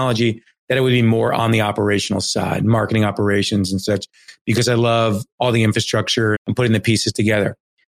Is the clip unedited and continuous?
no; 1 cut; at 6.3 s

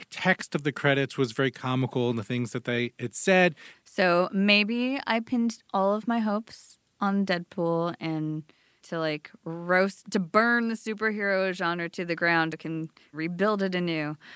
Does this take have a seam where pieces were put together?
yes; 2 cuts; at 3.7 s, 12.5 s

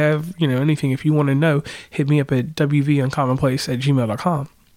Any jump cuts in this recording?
no; 0 cuts

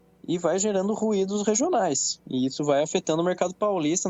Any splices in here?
no; 0 cuts

